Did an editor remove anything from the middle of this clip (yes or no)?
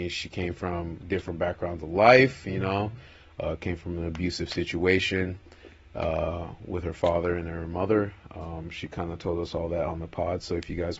no